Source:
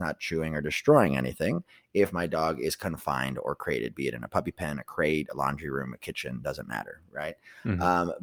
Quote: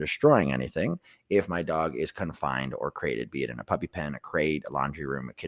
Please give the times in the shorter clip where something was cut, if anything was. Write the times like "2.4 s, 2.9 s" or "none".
none

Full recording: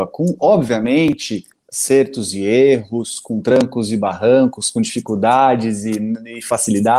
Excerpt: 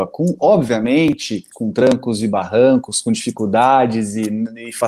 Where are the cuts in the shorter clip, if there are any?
1.5 s

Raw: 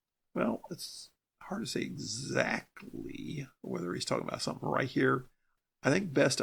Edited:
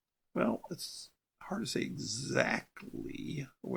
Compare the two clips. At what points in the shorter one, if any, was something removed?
none

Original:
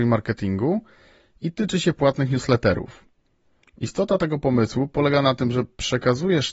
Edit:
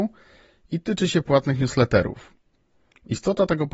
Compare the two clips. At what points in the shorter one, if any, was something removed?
none

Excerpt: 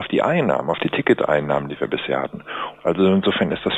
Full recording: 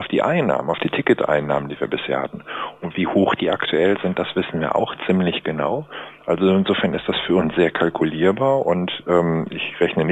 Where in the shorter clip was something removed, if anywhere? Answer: 2.7 s

